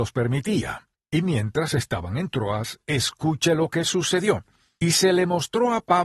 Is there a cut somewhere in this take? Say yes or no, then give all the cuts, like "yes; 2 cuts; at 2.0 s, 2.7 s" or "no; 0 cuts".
yes; 1 cut; at 0.9 s